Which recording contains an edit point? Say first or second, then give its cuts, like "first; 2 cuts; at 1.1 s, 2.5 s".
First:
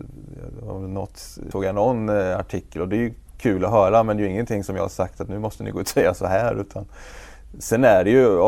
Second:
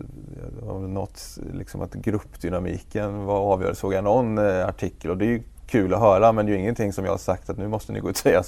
first; 1 cut; at 1.5 s